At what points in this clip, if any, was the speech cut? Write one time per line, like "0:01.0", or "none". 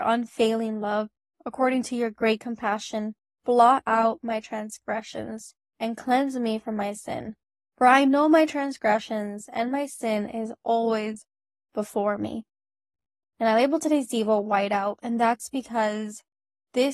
0:05.7

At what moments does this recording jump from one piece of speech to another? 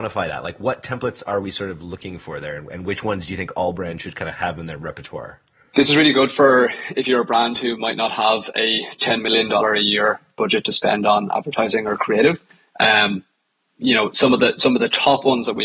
none

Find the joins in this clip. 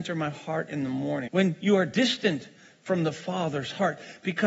0:01.3

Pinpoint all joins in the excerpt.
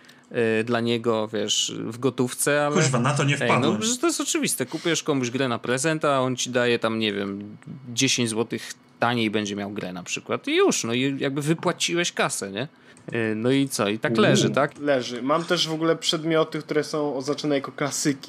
0:12.9
0:14.7

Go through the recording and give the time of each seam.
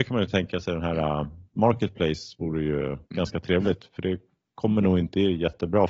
0:03.0

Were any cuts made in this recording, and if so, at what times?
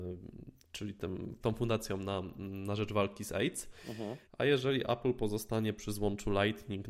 0:01.4
0:04.3

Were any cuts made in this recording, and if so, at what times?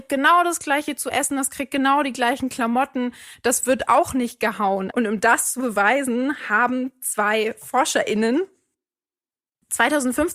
0:04.9

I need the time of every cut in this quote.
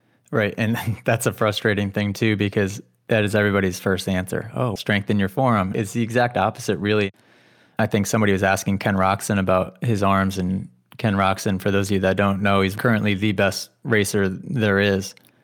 0:04.8

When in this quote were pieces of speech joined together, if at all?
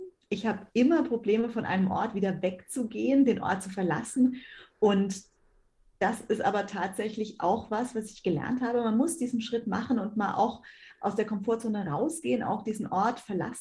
none

